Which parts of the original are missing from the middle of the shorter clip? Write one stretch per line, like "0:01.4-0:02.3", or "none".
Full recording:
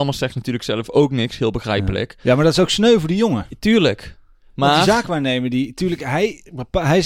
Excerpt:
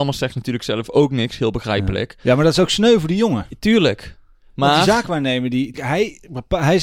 0:05.7-0:06.0